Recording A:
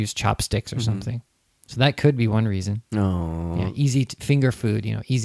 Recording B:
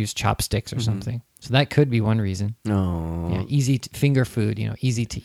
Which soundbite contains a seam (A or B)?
B